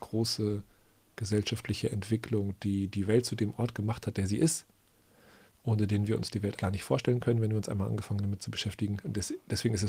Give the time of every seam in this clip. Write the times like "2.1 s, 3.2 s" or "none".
6.6 s